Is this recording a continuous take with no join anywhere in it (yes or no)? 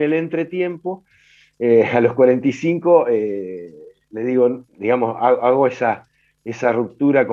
no